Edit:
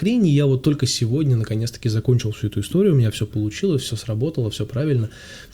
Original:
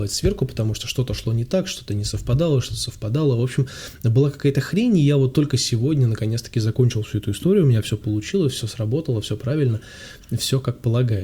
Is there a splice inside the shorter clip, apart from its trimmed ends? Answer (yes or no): no